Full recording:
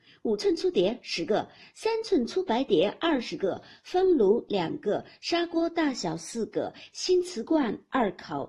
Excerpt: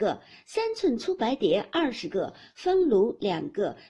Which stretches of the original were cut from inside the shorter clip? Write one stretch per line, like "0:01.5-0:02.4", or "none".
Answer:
none